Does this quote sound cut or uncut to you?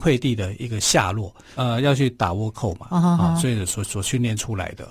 cut